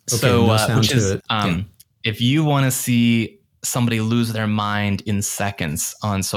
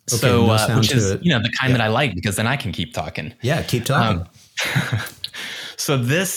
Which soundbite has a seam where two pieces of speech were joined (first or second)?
first